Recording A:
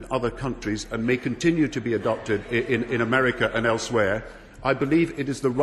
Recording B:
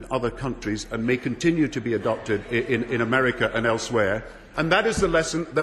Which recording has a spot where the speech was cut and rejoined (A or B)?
B